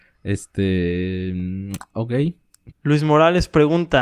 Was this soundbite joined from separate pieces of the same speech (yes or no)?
yes